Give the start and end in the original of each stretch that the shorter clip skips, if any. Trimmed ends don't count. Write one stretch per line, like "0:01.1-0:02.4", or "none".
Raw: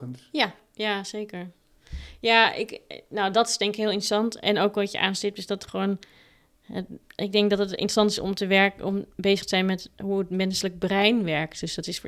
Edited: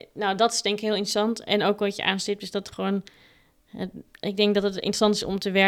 none